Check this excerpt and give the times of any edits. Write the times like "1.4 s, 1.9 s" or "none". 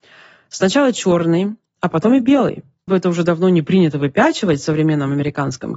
2.9 s

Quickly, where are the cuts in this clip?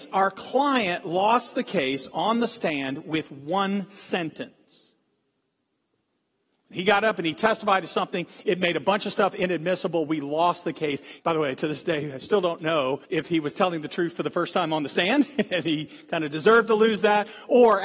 11.2 s, 13.0 s

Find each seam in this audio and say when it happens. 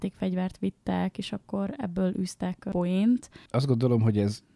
3.5 s

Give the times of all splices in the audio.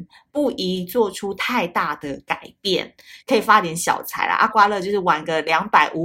3.2 s, 4.5 s

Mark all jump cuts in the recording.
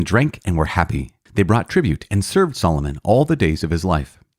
1.3 s

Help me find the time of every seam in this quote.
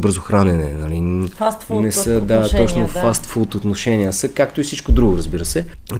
none

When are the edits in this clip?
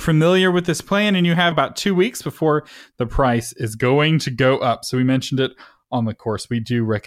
1.5 s

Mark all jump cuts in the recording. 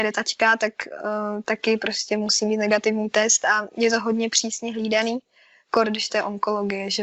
none

